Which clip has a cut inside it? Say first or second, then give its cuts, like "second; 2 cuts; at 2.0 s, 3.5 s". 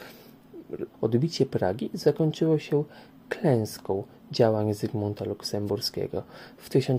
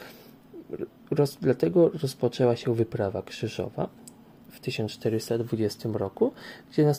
first; 1 cut; at 0.9 s